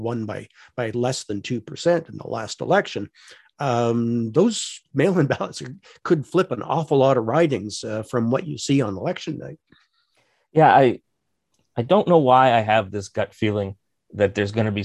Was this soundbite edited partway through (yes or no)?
no